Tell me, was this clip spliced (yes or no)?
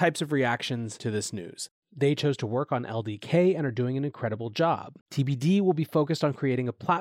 yes